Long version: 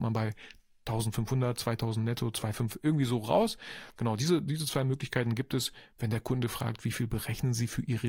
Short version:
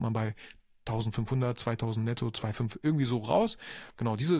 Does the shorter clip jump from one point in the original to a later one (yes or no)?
no